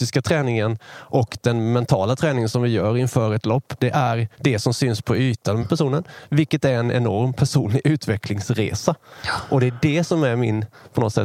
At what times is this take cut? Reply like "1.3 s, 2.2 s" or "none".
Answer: 4.3 s, 5.6 s